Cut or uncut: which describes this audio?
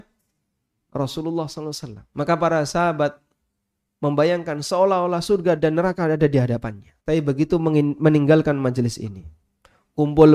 cut